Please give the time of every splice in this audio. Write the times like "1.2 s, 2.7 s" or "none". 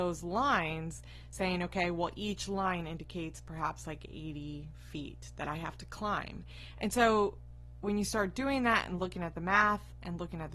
none